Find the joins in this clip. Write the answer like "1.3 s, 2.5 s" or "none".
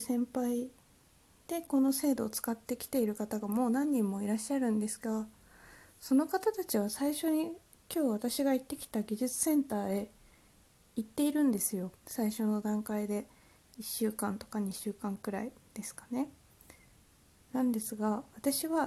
12.0 s